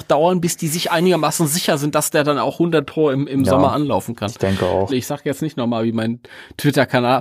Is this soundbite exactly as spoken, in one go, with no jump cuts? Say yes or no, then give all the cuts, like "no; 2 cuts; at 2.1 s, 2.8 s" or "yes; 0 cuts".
no; 1 cut; at 4.9 s